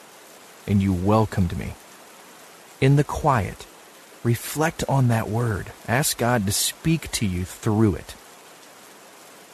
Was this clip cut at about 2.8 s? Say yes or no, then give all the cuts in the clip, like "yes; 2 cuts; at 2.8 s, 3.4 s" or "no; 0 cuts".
yes; 2 cuts; at 2.8 s, 5.8 s